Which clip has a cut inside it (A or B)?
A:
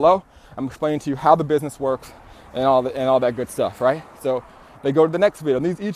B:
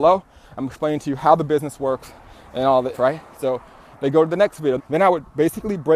B